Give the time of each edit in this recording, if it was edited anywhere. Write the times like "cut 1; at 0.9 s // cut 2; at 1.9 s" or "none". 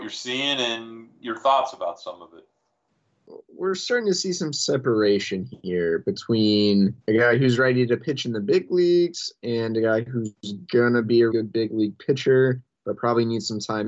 cut 1; at 7.0 s // cut 2; at 11.3 s